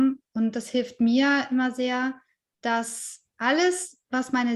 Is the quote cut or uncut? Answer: cut